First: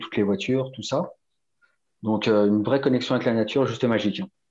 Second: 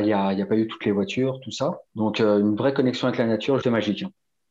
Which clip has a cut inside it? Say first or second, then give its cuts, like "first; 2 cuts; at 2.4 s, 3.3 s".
second; 2 cuts; at 1.9 s, 3.6 s